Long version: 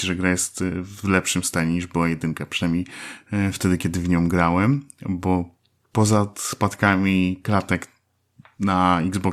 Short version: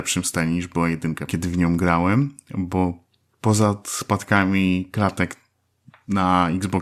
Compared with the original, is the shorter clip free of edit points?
no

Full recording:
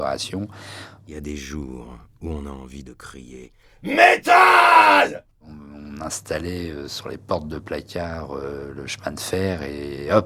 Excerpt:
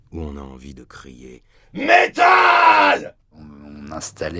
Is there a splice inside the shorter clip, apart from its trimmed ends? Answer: no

